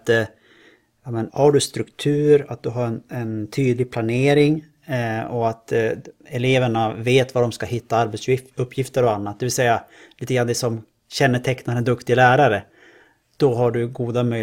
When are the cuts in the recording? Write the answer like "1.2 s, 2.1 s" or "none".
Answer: 1.3 s